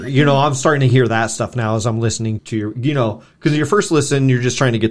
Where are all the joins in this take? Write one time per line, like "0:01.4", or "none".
0:02.4